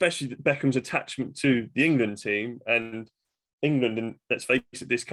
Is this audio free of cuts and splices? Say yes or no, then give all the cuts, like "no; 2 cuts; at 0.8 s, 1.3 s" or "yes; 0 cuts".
yes; 0 cuts